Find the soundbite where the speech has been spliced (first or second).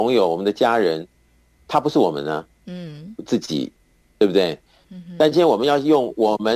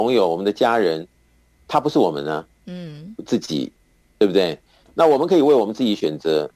first